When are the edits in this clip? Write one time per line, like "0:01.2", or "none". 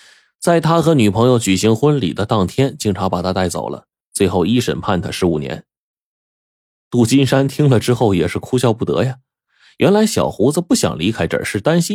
none